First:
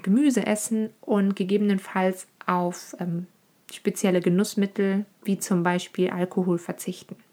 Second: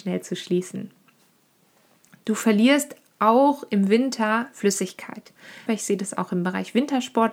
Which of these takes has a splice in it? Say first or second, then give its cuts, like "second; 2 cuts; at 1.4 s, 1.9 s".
second; 1 cut; at 5.7 s